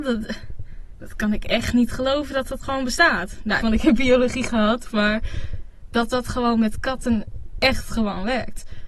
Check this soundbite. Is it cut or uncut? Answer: cut